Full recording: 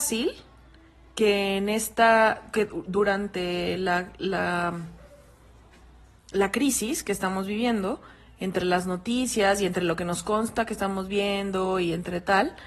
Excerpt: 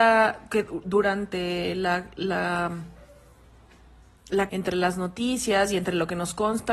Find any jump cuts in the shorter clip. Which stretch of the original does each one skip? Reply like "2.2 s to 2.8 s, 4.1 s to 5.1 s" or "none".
6.5 s to 8.4 s